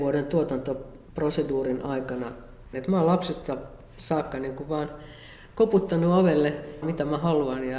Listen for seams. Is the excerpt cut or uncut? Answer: cut